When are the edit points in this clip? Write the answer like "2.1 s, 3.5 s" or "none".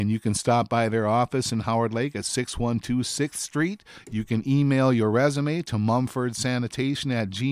none